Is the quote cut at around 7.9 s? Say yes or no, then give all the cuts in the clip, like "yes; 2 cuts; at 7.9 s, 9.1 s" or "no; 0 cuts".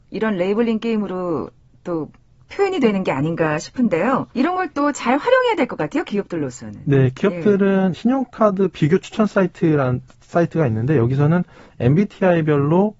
yes; 2 cuts; at 4.3 s, 7.9 s